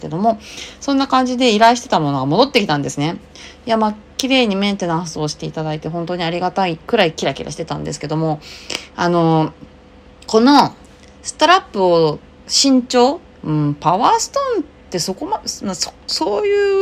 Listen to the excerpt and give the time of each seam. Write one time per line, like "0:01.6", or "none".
0:13.4